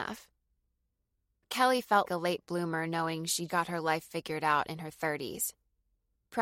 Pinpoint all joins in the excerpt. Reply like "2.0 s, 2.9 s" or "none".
2.1 s, 3.5 s